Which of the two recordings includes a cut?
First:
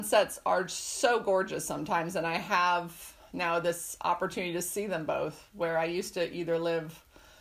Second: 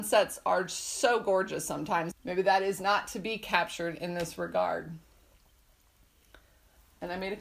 second; 1 cut; at 2.1 s

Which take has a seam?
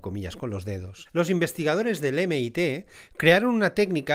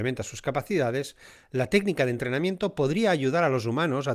first; 1 cut; at 1.1 s

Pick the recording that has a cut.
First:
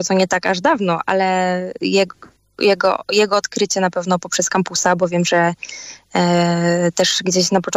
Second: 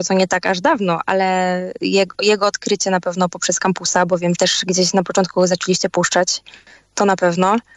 second; 2 cuts; at 2.1 s, 4.3 s

